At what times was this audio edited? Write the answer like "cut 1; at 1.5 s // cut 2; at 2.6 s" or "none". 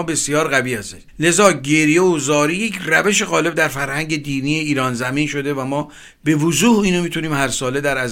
cut 1; at 1.1 s